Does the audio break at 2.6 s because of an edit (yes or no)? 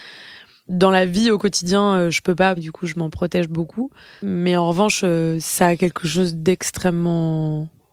yes